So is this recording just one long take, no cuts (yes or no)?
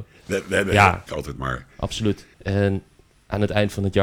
no